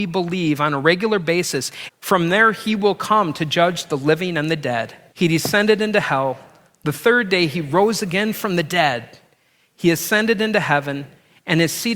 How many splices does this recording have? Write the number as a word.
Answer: two